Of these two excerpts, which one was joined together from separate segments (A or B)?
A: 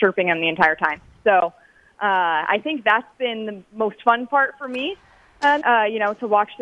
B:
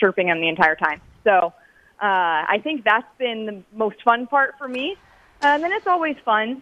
A